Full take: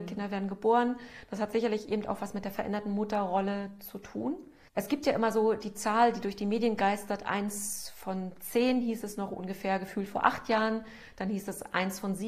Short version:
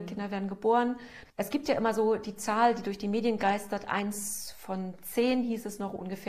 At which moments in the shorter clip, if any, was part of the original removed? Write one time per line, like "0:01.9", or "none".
0:01.3

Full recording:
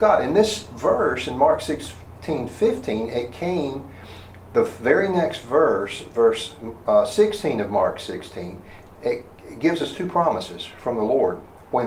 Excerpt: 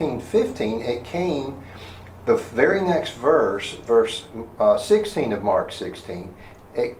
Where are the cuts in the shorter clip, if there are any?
none

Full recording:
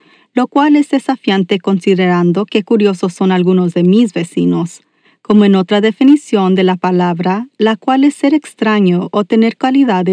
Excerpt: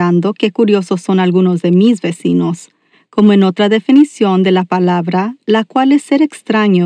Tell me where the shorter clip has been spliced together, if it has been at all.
none

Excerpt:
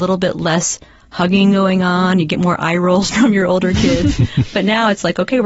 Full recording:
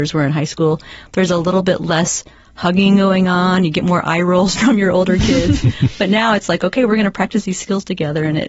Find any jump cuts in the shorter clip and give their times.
none

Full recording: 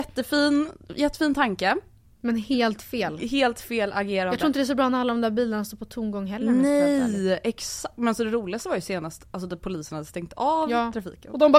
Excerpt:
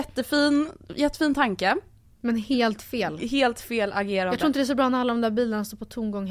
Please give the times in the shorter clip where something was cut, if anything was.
none

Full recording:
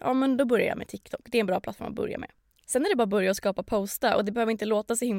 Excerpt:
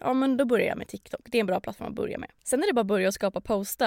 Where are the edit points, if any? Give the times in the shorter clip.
0:02.4

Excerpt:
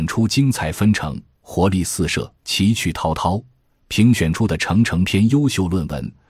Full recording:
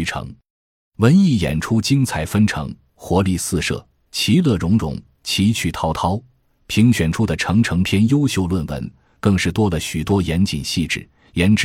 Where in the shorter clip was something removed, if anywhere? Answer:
0:02.4

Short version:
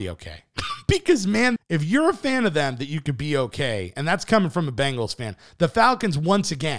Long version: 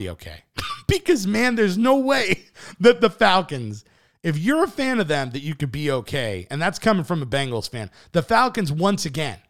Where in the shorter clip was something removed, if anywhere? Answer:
0:01.6

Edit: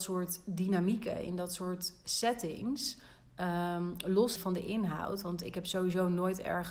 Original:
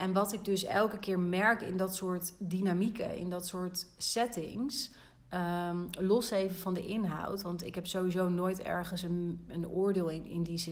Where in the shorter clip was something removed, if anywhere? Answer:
0:04.4

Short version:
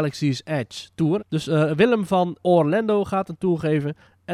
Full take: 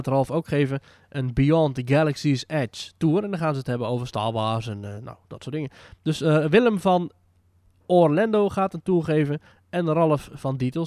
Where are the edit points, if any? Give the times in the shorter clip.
0:01.2
0:02.4

